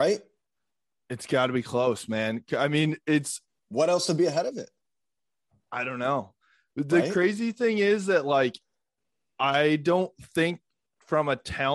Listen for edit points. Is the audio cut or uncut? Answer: uncut